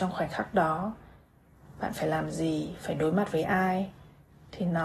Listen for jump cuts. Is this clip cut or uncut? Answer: uncut